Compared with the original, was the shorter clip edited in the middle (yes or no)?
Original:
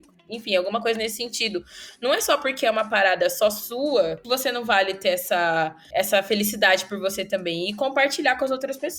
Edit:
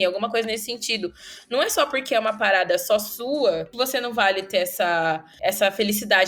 no